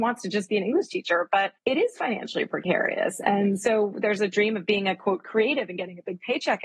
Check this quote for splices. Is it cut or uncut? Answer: cut